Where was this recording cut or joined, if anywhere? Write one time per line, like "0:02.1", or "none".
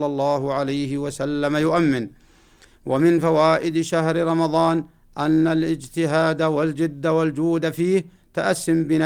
none